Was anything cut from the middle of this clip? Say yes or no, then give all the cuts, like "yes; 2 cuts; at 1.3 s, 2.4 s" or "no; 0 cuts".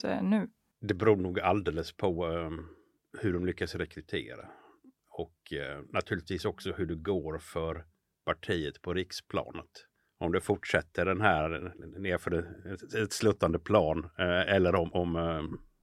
no; 0 cuts